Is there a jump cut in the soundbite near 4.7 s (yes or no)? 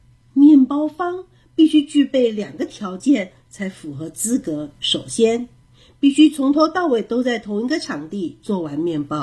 yes